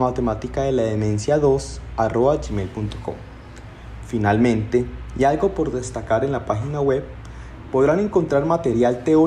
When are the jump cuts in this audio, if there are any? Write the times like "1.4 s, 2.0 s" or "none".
none